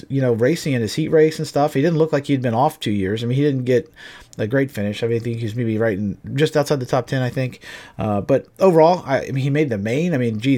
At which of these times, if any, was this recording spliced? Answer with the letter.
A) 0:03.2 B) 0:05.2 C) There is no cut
C